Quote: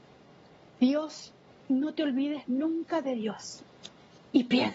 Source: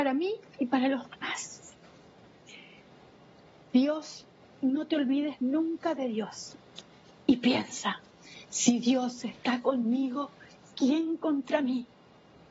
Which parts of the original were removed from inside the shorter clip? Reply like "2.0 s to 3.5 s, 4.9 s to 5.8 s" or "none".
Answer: none